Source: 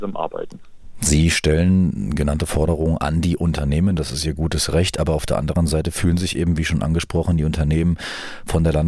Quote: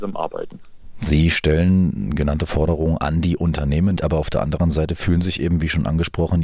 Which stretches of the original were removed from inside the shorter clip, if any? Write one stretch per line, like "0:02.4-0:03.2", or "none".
0:04.0-0:04.9